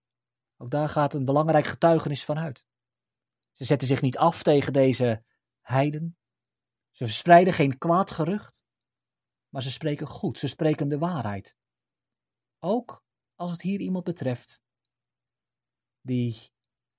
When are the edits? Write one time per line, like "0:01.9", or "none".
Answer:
none